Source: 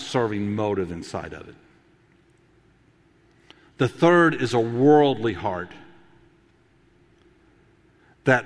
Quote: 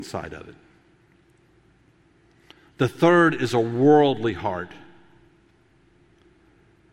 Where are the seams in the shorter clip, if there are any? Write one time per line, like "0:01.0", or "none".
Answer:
none

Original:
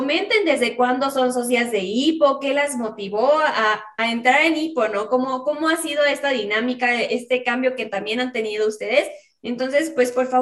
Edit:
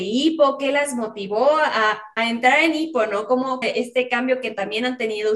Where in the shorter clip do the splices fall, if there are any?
0:03.6

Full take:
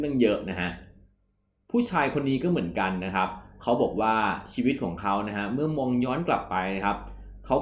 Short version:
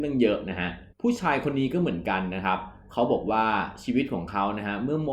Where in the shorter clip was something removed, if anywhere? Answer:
0:00.9

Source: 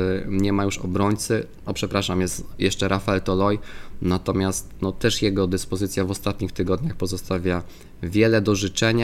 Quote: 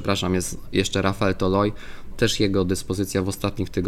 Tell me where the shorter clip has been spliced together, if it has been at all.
0:02.1

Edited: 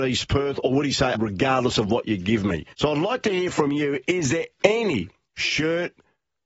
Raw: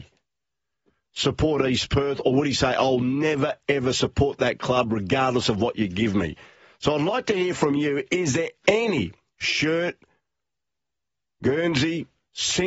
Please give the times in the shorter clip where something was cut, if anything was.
0:01.1
0:02.7

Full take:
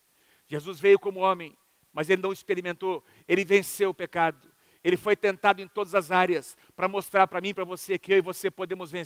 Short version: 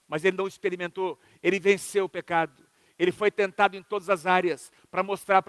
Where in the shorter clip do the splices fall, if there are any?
none

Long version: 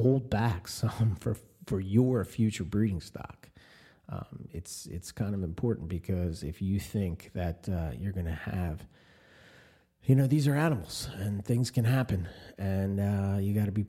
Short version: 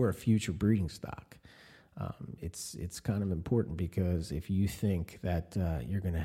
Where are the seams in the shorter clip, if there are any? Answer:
none

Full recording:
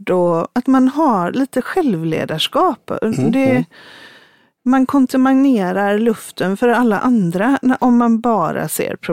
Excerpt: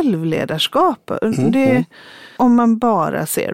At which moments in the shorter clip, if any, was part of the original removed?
0:02.4

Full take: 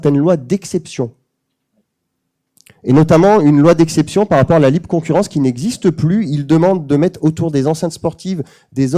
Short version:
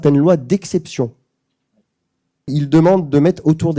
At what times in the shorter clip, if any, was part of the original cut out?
0:02.5

